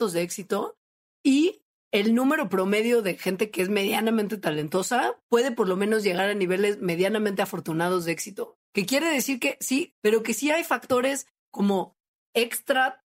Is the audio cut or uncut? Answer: cut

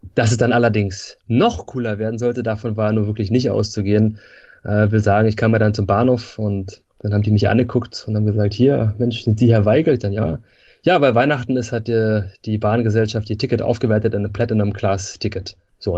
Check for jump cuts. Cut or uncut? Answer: uncut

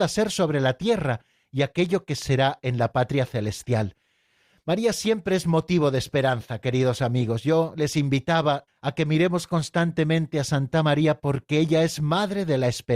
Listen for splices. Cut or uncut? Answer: cut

